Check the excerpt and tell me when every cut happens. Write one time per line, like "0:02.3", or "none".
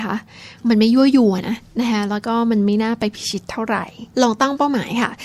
0:01.4

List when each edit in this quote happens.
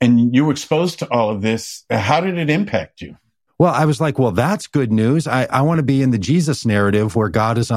0:05.5

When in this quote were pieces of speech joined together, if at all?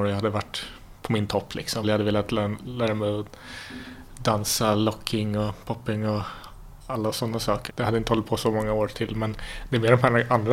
0:01.8
0:07.7

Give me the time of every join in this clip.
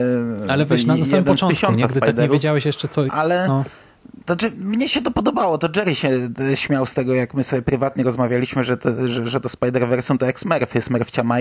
0:03.1

